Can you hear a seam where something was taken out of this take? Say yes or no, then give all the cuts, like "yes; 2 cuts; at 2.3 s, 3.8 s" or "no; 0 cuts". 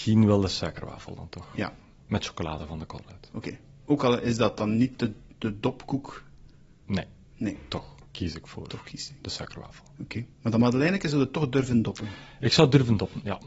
yes; 2 cuts; at 8.1 s, 10.3 s